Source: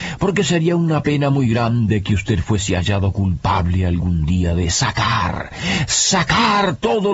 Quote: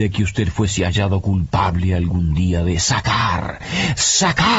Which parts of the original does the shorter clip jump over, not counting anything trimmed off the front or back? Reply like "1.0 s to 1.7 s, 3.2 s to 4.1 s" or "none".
none